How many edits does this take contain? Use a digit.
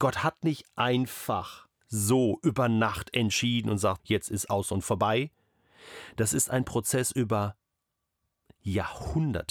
1